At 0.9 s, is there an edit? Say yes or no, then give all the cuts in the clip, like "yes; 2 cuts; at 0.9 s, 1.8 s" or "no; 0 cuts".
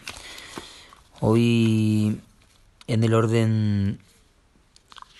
no; 0 cuts